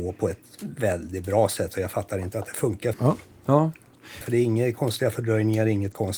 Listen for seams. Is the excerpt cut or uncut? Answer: cut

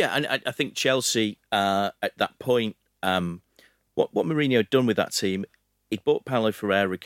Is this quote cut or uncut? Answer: uncut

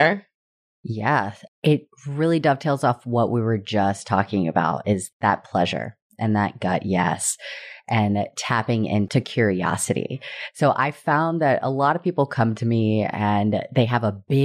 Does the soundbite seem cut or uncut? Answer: uncut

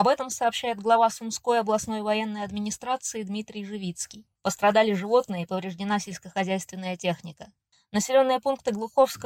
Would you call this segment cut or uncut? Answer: cut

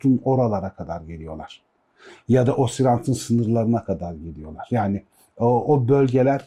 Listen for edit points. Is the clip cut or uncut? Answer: uncut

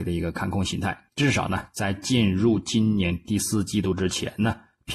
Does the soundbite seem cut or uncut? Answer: cut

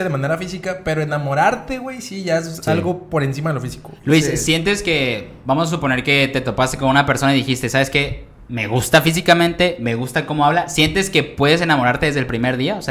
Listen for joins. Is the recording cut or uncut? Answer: uncut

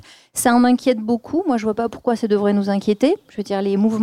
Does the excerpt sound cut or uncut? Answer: uncut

